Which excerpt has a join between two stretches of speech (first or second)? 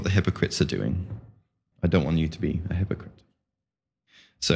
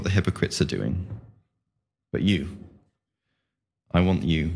first